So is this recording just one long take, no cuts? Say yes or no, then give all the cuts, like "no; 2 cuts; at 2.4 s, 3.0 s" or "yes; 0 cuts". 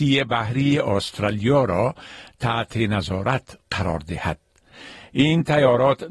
yes; 0 cuts